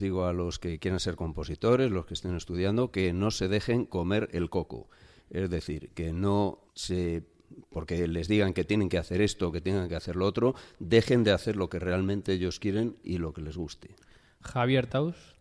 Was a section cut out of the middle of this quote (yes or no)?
yes